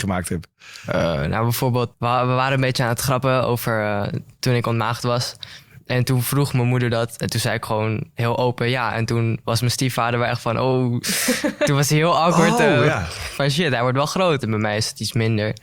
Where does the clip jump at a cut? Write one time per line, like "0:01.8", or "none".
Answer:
0:01.9
0:14.4

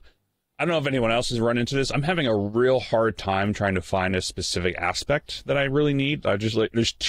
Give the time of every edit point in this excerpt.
none

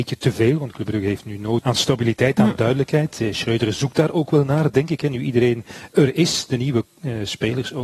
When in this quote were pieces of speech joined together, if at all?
0:01.6

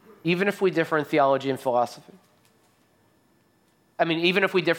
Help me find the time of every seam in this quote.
none

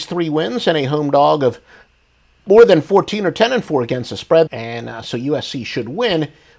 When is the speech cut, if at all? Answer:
0:04.5

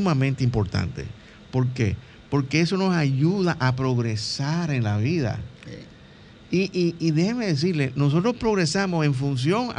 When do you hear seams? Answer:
none

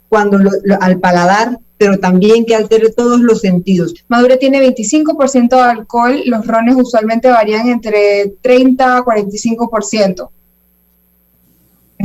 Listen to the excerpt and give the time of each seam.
0:03.9

